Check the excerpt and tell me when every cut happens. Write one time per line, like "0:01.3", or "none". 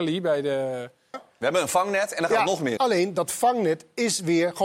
0:01.1
0:02.8